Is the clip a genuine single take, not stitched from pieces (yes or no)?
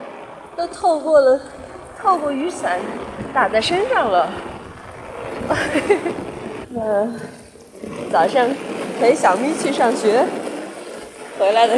no